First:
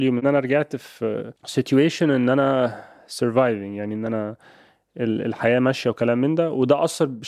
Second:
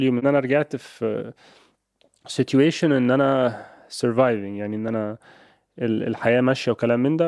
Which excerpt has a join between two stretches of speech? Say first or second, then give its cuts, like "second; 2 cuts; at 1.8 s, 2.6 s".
first; 1 cut; at 1.4 s